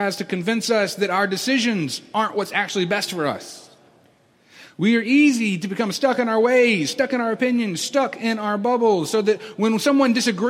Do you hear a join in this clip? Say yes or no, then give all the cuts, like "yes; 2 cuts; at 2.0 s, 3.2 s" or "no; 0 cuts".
no; 0 cuts